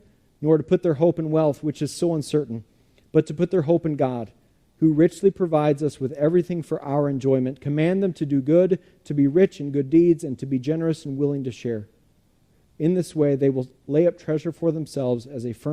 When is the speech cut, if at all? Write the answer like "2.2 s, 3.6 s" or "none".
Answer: none